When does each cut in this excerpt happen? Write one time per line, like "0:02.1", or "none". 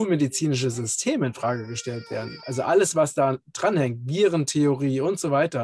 none